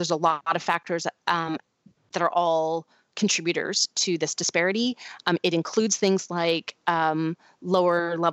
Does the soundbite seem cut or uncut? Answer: uncut